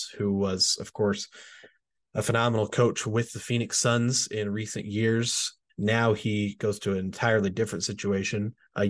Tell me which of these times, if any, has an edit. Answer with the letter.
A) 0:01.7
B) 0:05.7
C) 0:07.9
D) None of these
B